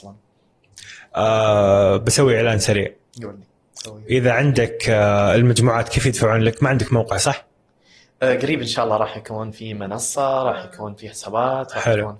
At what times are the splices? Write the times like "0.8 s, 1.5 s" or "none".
none